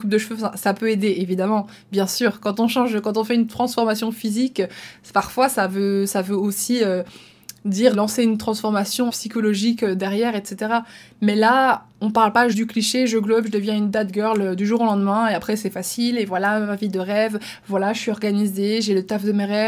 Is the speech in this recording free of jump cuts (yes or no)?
no